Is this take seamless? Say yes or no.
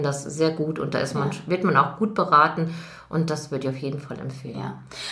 yes